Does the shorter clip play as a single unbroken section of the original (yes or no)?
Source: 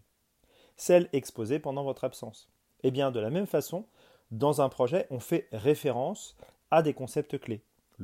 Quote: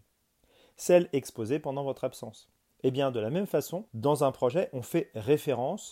no